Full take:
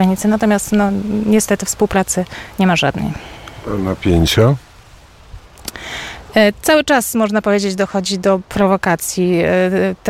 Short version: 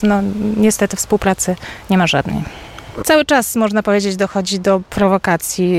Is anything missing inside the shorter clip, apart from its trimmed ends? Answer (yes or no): yes